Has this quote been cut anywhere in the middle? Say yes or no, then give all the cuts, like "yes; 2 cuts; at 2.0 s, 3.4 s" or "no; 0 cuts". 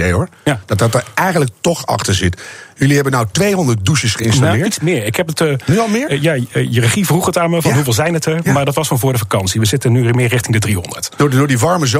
no; 0 cuts